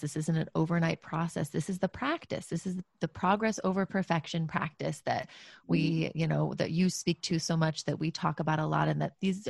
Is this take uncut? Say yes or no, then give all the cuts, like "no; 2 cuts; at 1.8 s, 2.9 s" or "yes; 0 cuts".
yes; 0 cuts